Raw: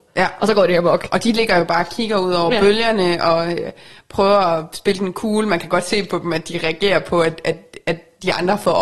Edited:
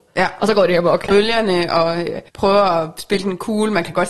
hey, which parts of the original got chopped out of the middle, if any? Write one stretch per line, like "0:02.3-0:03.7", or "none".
0:01.1-0:02.6
0:03.8-0:04.0